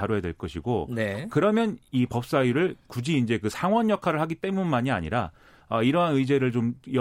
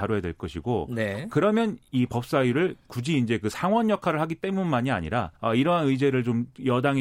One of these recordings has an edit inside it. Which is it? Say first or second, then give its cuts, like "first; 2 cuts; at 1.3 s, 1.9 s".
second; 1 cut; at 5.4 s